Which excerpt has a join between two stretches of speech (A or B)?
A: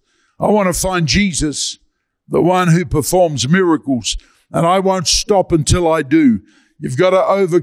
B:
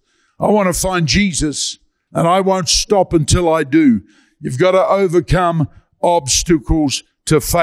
B